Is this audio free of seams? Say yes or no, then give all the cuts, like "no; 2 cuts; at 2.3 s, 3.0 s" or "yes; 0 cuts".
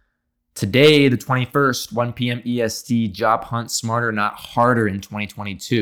yes; 0 cuts